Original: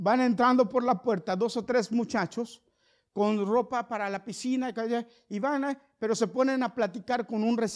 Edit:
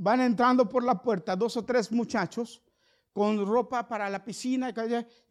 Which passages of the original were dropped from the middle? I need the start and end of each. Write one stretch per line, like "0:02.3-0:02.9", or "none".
none